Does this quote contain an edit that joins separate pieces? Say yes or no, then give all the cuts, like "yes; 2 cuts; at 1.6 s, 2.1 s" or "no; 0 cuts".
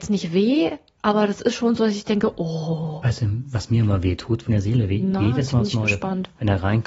yes; 1 cut; at 4.5 s